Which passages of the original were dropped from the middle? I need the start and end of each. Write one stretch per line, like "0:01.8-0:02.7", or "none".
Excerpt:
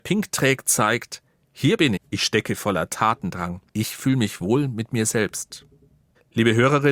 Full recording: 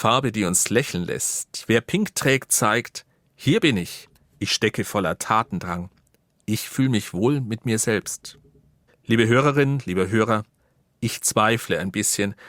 0:03.8-0:04.3
0:06.0-0:06.4